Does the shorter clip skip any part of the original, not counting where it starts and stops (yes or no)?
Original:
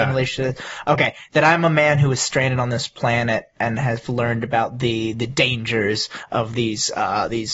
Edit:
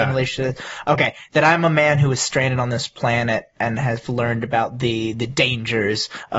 no